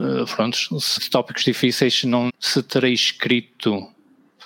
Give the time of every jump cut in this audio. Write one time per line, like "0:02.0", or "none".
0:01.0
0:02.3

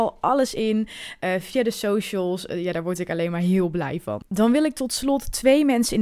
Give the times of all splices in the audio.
0:04.3

